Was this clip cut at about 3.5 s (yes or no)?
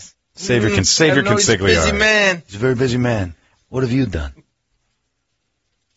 yes